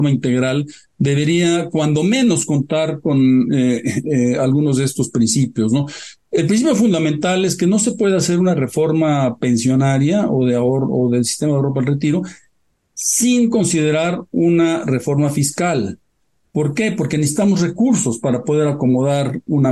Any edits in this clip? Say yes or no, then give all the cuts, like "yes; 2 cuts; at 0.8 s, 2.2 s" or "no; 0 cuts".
no; 0 cuts